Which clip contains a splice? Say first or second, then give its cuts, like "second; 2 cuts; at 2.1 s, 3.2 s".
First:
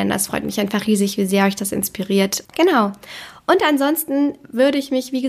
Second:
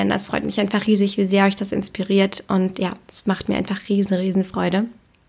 first; 1 cut; at 2.4 s